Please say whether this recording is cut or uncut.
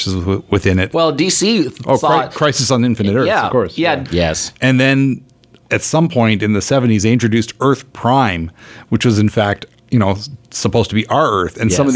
cut